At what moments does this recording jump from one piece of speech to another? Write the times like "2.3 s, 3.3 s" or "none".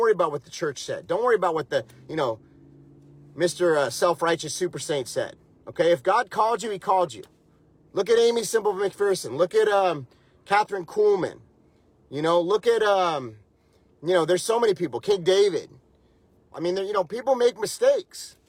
16.5 s